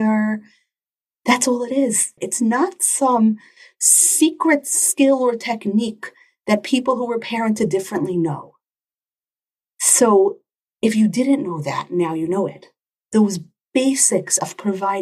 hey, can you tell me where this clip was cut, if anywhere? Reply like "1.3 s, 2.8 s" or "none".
2.2 s